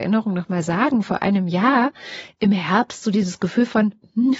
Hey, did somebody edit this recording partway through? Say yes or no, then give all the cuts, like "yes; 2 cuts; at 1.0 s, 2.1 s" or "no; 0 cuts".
no; 0 cuts